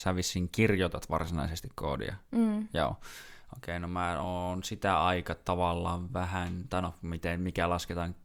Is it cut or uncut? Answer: uncut